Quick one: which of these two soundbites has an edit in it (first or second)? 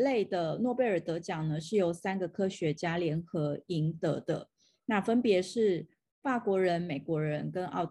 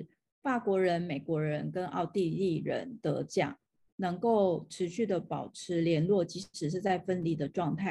second